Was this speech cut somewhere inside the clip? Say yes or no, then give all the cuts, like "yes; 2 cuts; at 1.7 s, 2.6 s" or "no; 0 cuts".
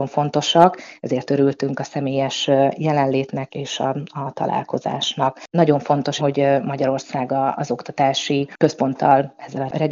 yes; 2 cuts; at 3.5 s, 6.2 s